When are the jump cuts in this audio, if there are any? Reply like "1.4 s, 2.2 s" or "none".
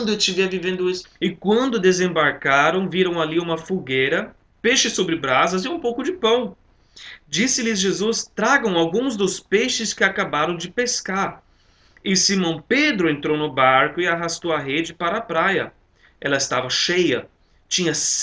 1.0 s